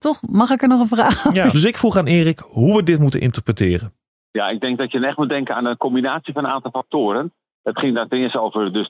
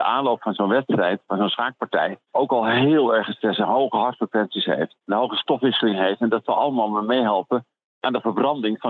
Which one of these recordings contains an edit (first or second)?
first